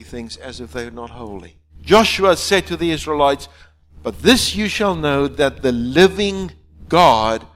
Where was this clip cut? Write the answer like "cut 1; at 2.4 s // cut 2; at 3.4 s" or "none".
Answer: cut 1; at 1.7 s